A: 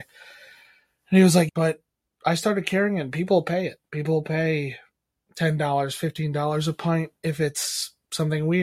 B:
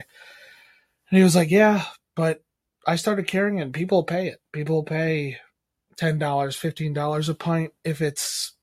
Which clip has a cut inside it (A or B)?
A